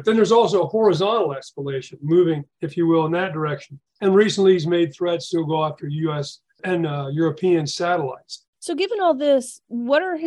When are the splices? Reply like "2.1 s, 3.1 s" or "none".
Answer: 3.9 s, 8.5 s